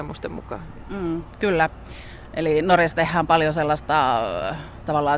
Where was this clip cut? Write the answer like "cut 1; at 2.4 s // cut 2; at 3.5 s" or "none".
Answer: none